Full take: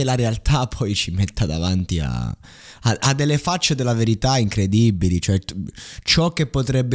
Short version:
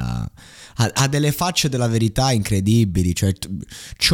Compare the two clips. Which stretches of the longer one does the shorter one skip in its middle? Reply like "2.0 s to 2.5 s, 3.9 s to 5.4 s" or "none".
none

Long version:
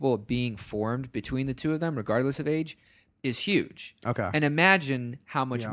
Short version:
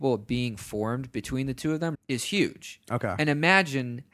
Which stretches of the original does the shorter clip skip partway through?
1.9 s to 3.1 s

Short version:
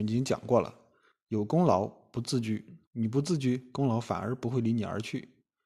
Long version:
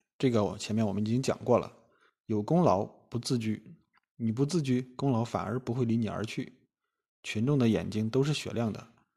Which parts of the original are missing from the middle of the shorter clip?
3.8 s to 4.1 s

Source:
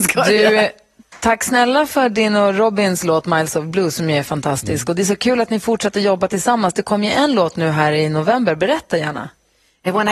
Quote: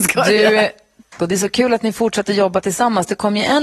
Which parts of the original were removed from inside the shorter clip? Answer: 1.2 s to 4.8 s

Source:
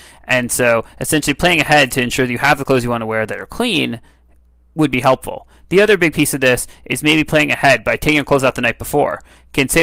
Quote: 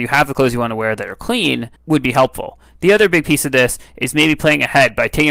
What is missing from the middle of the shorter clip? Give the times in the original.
4.1 s to 4.6 s

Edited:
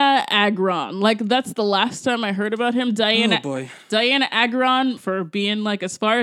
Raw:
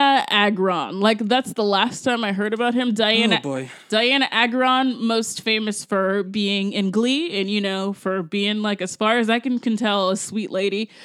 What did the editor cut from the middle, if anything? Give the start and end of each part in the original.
5.0 s to 8.0 s

